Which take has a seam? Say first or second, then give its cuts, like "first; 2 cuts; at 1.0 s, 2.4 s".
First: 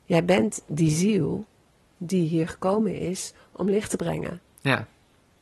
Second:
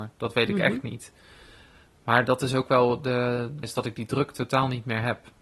second; 1 cut; at 3.6 s